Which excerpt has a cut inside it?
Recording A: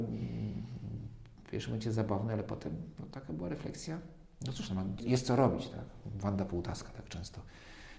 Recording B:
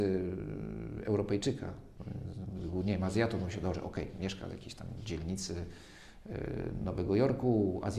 A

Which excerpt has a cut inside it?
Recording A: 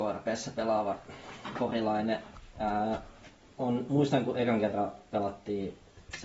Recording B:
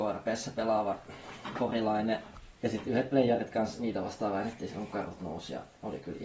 B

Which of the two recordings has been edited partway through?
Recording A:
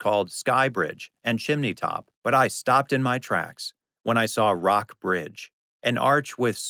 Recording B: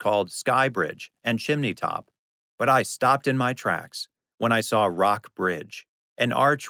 A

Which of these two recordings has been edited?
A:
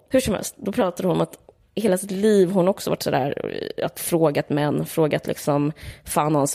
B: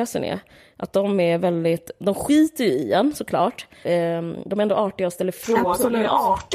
B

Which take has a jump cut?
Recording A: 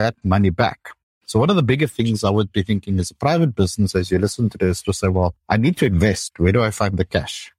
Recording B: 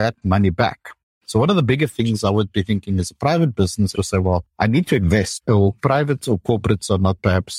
B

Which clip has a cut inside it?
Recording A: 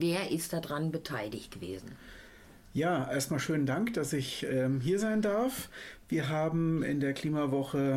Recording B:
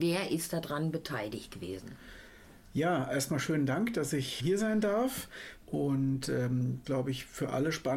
B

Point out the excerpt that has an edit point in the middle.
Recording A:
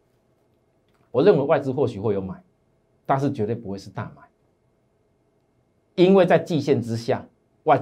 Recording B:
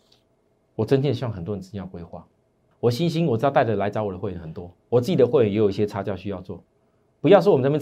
B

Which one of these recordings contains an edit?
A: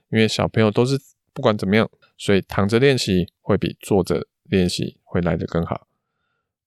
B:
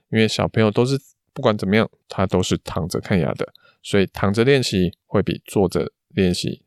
A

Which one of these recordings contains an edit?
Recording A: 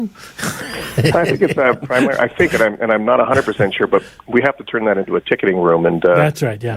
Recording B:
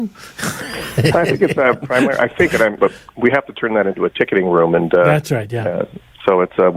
B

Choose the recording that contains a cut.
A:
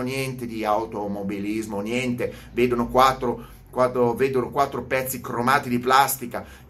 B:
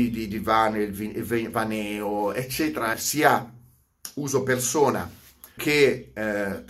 B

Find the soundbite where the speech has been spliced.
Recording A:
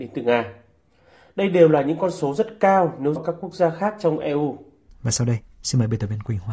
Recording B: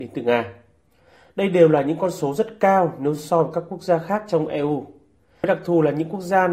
A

